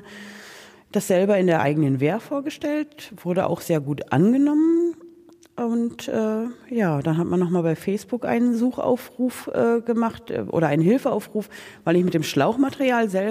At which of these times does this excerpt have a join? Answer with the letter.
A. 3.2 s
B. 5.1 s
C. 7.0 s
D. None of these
D